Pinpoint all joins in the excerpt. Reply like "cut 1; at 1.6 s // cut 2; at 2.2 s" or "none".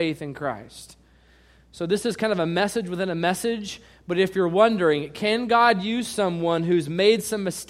none